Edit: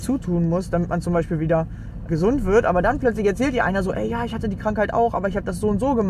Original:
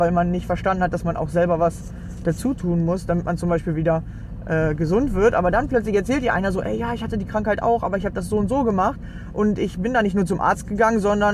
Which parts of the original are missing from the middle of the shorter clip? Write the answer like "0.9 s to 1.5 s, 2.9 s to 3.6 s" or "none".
4.4 s to 4.8 s